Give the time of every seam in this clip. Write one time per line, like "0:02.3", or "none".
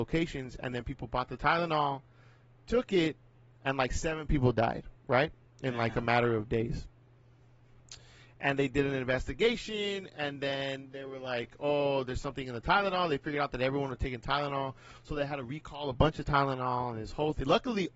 none